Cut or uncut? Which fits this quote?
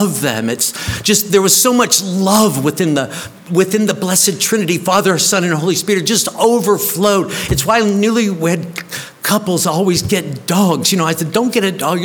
uncut